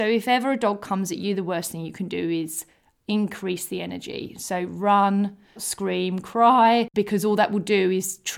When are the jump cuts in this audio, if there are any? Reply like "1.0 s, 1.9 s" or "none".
5.6 s, 6.9 s